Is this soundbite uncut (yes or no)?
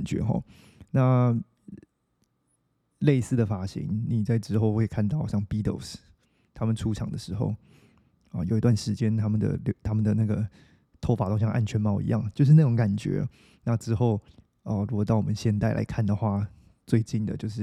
yes